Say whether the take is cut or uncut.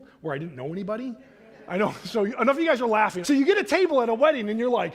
cut